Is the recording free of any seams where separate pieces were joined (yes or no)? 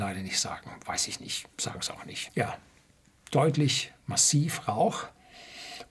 no